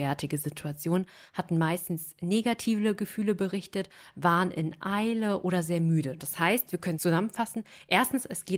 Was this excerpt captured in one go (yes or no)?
yes